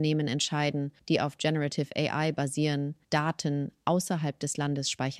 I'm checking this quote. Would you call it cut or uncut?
cut